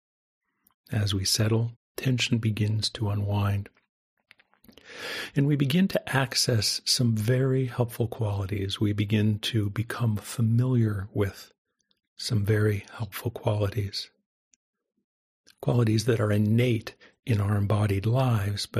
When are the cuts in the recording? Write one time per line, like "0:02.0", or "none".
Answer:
0:01.7